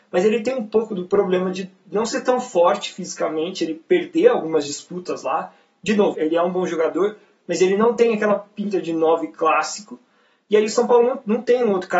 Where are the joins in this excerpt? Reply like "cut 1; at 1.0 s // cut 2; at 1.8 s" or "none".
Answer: cut 1; at 6.1 s